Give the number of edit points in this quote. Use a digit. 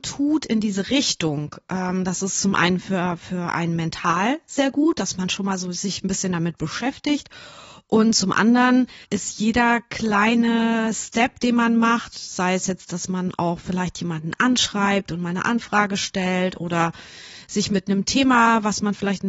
1